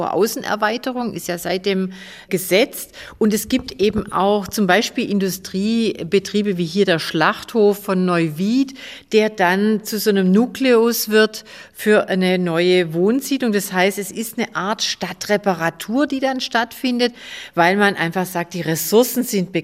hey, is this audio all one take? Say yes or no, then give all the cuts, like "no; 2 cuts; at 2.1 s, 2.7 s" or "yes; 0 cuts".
yes; 0 cuts